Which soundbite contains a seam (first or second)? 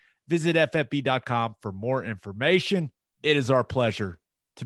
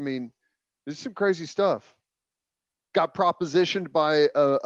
first